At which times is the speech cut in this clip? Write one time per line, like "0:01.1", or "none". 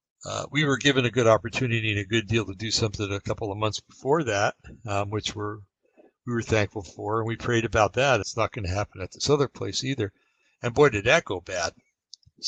0:08.2